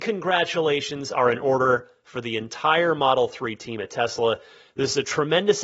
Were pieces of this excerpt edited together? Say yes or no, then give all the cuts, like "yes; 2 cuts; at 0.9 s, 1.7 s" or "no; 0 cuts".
no; 0 cuts